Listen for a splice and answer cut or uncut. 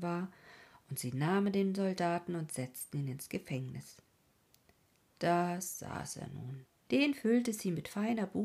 cut